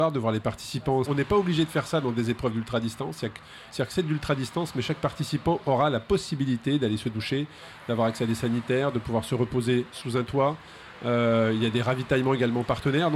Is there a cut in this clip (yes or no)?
yes